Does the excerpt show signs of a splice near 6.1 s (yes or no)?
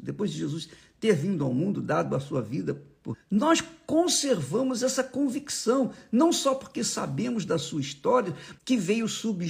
no